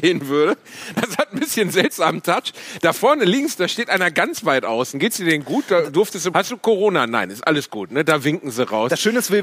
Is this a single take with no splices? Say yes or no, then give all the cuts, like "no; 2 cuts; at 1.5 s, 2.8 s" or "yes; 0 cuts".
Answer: no; 1 cut; at 6.3 s